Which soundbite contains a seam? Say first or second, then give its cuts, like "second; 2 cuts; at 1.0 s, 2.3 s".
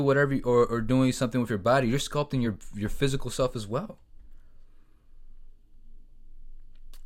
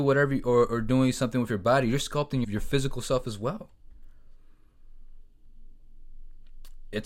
second; 1 cut; at 2.4 s